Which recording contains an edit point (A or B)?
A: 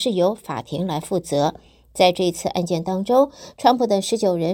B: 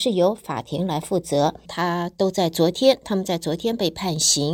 B